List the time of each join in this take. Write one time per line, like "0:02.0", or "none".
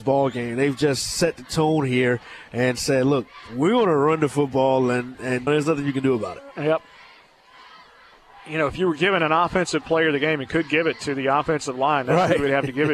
0:05.5